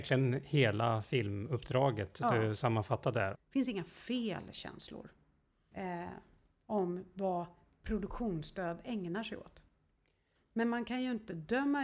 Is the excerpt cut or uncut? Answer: cut